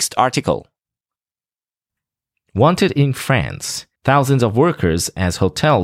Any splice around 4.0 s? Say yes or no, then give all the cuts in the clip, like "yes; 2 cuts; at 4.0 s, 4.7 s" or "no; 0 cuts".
yes; 1 cut; at 4.0 s